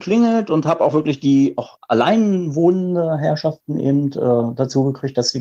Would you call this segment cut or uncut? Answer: uncut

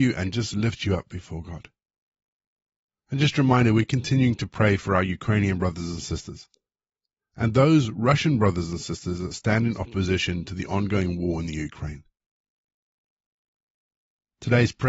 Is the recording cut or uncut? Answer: uncut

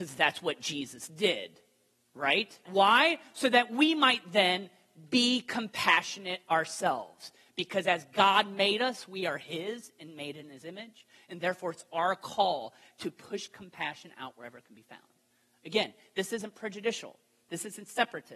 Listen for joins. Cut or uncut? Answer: cut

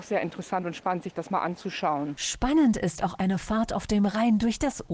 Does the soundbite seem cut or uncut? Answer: uncut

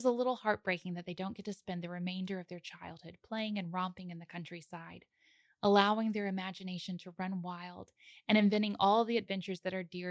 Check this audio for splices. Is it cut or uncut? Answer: uncut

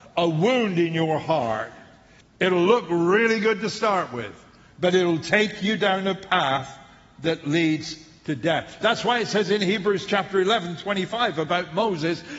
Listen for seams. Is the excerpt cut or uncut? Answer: cut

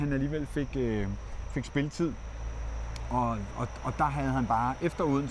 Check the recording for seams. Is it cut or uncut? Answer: uncut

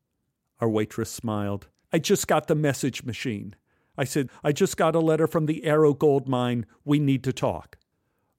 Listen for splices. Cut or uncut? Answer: cut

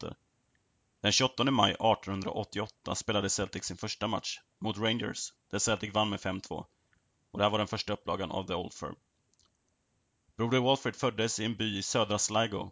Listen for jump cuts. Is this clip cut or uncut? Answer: uncut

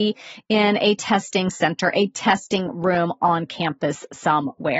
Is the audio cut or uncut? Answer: uncut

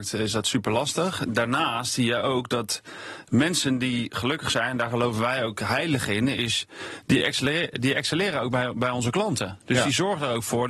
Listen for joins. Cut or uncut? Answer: uncut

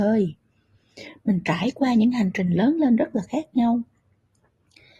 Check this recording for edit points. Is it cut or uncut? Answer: uncut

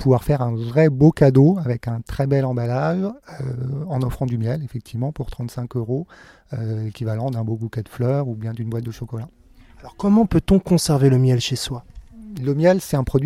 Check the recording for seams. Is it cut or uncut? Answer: uncut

